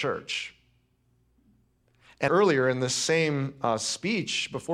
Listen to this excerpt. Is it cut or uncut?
cut